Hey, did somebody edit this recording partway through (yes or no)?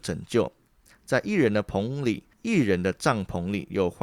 yes